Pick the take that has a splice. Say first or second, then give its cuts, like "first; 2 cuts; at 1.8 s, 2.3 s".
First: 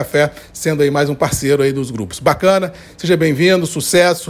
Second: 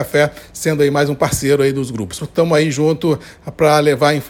second; 1 cut; at 2.2 s